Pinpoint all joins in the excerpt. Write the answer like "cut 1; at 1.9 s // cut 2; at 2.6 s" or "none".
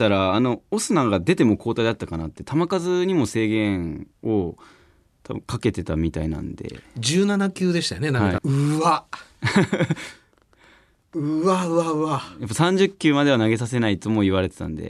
cut 1; at 8.4 s